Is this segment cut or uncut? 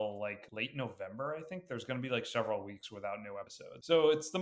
uncut